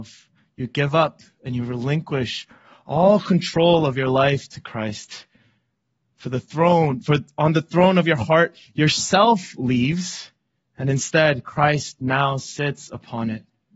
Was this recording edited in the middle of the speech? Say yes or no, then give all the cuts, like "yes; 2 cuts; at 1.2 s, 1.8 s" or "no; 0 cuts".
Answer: no; 0 cuts